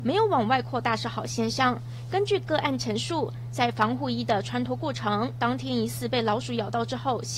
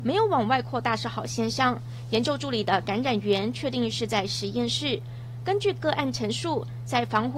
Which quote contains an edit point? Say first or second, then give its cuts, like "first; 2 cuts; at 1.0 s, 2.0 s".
first; 1 cut; at 2.1 s